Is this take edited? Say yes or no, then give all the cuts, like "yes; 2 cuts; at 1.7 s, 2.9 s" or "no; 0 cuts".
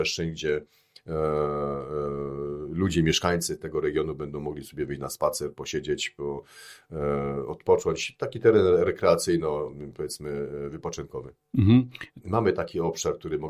yes; 1 cut; at 12.2 s